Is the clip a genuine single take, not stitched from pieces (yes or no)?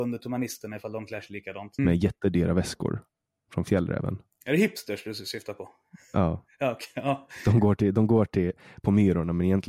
no